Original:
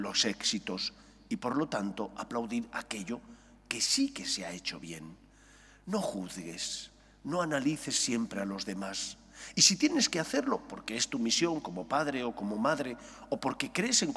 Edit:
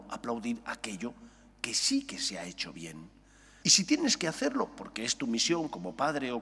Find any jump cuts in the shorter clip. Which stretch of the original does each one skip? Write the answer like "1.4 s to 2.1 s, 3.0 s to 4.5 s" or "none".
5.7 s to 9.5 s